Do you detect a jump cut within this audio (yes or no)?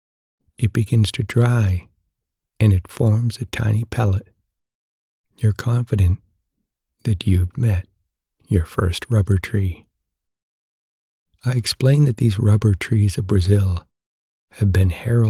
yes